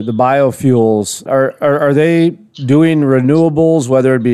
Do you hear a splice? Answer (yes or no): yes